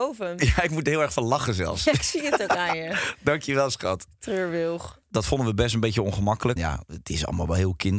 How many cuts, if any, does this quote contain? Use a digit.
2